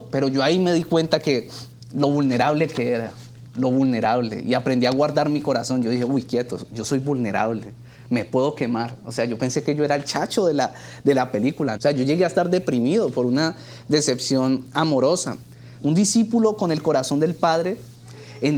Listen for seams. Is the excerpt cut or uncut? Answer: cut